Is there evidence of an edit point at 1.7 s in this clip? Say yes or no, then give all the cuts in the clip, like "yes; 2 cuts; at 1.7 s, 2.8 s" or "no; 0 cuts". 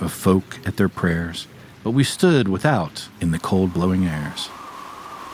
yes; 1 cut; at 1.7 s